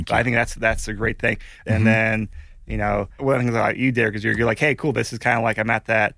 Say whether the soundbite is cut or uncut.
cut